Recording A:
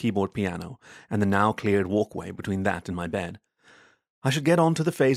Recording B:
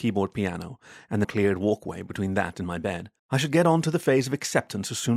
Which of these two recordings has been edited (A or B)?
B